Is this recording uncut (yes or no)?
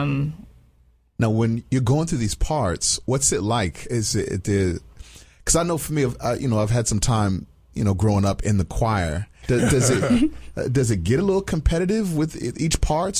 no